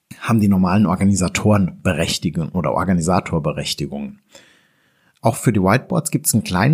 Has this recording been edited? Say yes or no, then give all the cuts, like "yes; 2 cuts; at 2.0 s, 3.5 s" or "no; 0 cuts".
no; 0 cuts